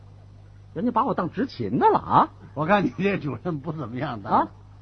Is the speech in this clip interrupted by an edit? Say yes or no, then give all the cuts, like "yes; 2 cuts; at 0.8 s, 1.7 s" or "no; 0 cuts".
no; 0 cuts